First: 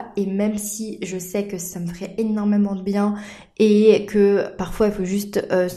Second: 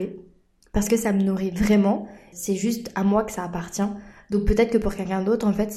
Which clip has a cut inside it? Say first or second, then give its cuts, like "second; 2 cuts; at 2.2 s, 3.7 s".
second; 1 cut; at 2.3 s